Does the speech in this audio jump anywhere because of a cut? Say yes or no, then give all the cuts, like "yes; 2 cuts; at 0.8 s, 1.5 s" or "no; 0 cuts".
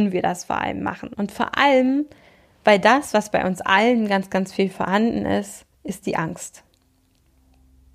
yes; 2 cuts; at 1.1 s, 5.7 s